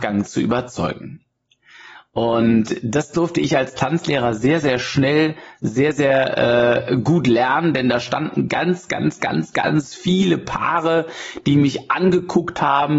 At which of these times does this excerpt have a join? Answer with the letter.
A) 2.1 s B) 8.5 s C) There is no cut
C